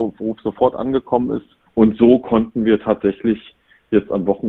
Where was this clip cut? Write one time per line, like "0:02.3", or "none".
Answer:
0:01.7